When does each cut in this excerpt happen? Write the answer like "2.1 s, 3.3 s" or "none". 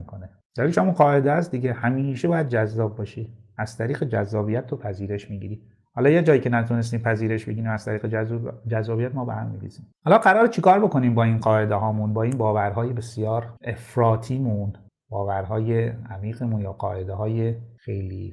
13.6 s